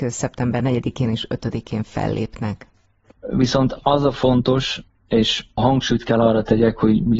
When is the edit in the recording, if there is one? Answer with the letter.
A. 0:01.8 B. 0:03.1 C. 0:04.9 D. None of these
B